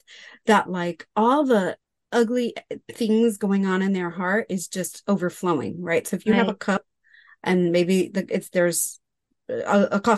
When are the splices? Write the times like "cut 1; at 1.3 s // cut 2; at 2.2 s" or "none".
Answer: none